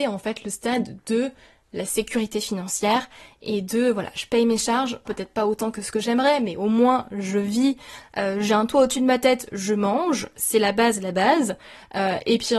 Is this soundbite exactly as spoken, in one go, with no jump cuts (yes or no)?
no